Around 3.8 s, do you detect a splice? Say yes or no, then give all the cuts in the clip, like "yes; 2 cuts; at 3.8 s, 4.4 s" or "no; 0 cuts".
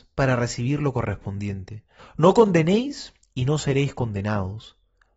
no; 1 cut; at 2.0 s